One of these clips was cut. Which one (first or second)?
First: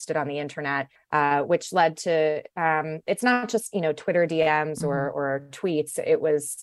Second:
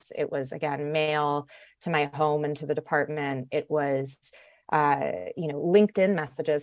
first